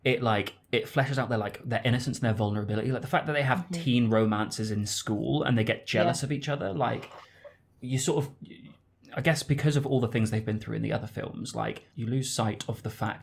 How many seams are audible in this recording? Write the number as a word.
zero